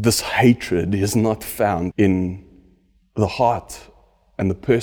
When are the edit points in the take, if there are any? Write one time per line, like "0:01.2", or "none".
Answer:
0:01.9